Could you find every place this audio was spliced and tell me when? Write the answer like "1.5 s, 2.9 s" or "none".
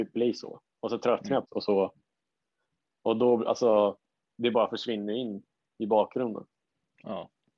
1.4 s

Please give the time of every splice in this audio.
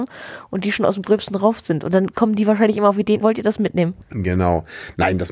3.2 s

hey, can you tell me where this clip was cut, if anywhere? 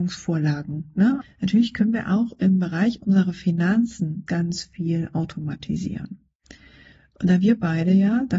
1.2 s, 4.3 s

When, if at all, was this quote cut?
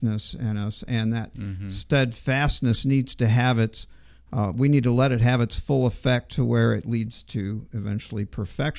none

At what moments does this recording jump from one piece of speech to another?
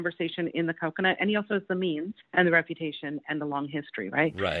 2.2 s

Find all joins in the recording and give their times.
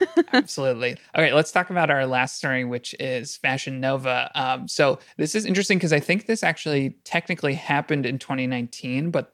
none

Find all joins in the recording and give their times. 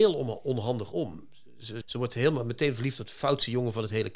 1.8 s

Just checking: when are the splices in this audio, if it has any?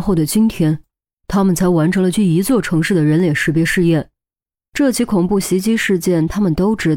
2.1 s, 4.7 s

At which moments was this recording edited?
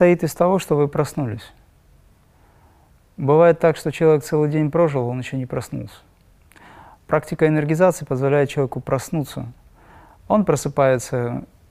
none

